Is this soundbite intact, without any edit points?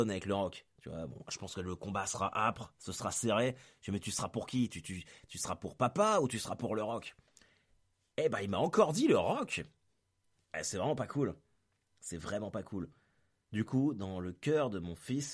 yes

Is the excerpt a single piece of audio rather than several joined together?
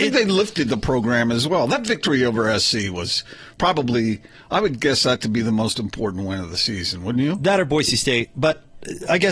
yes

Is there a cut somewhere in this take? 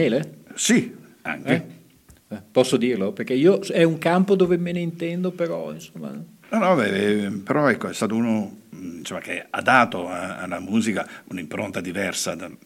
no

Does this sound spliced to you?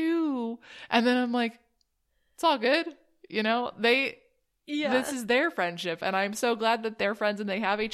no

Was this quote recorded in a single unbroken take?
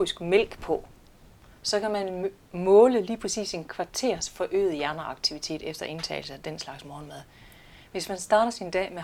yes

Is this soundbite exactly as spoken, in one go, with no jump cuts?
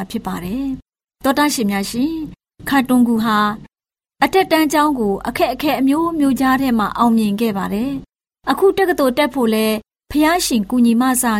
yes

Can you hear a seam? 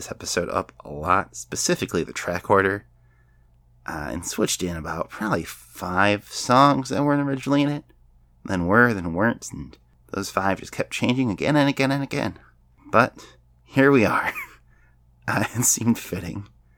no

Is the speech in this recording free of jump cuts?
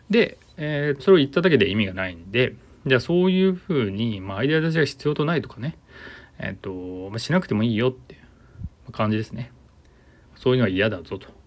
no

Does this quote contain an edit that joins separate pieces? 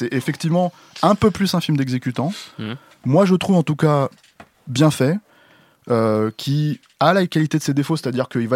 no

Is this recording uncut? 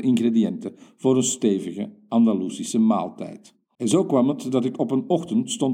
no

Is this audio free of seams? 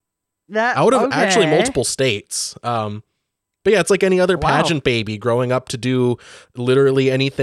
yes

